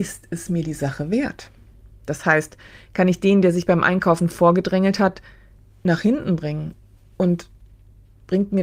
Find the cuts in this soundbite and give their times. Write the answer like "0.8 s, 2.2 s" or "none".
none